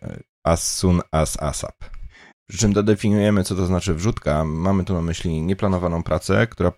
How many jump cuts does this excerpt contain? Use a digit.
1